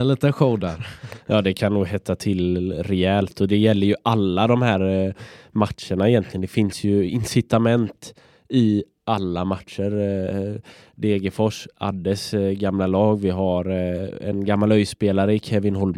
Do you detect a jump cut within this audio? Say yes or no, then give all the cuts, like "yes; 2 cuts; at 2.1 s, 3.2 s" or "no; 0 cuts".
no; 0 cuts